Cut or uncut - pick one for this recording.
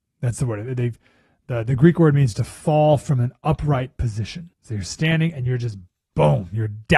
cut